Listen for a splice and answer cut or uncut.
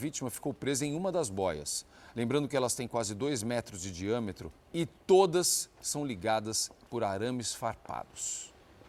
cut